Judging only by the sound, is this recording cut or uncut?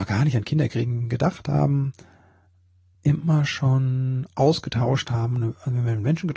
uncut